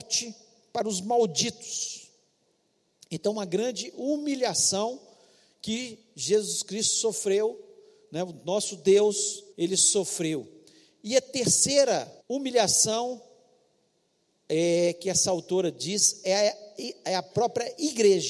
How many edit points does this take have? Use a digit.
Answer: 2